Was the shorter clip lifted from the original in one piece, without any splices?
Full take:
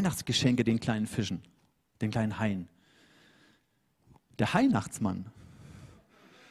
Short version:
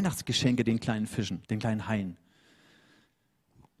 no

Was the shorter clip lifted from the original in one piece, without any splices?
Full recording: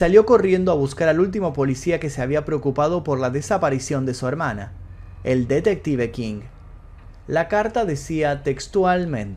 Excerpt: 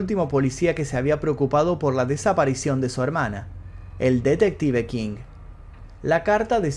yes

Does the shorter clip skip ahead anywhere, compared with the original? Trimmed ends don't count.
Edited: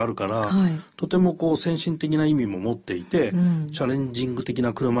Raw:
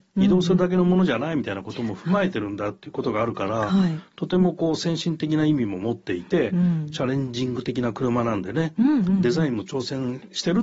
no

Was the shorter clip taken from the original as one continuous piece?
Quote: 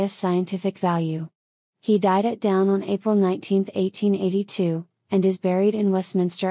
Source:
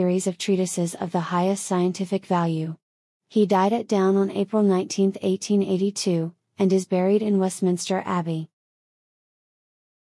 yes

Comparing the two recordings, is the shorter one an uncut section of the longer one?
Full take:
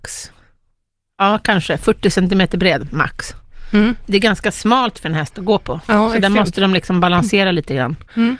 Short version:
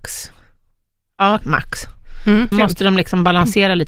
no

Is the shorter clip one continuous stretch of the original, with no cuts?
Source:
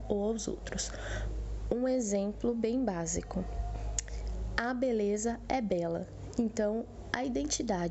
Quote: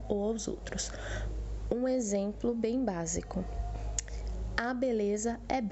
yes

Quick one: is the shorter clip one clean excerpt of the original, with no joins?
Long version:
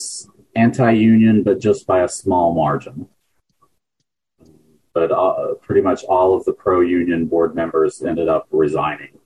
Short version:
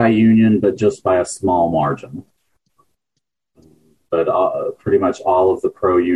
yes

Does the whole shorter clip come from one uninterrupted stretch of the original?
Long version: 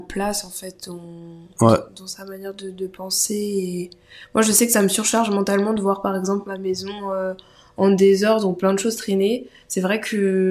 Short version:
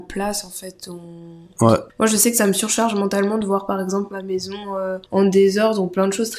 no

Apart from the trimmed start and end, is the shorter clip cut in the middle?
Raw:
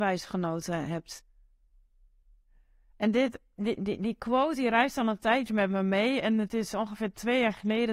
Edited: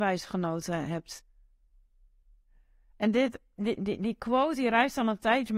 no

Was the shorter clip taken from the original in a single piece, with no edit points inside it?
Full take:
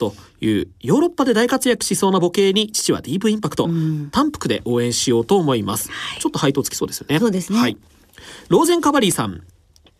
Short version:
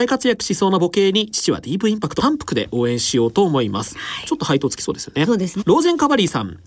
no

